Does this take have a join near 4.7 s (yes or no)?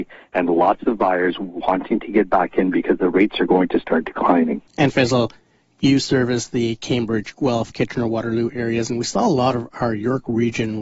yes